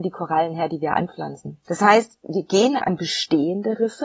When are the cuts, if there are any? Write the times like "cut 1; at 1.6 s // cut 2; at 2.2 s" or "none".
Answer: cut 1; at 1.6 s // cut 2; at 2.8 s